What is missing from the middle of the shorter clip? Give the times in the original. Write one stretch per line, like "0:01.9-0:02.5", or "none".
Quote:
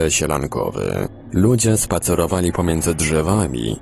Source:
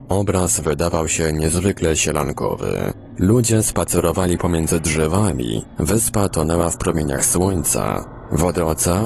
none